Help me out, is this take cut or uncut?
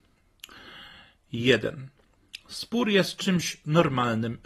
uncut